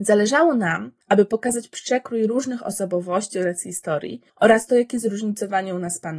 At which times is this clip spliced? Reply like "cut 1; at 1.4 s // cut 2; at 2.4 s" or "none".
cut 1; at 1.0 s // cut 2; at 4.3 s